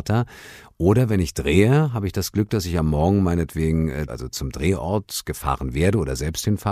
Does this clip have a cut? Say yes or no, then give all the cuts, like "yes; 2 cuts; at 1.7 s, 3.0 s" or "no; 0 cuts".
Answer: yes; 1 cut; at 4.1 s